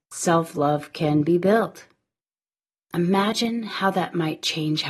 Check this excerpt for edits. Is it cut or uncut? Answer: cut